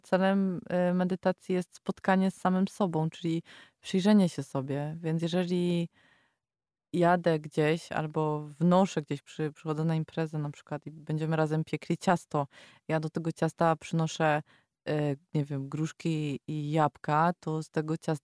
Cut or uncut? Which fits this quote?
uncut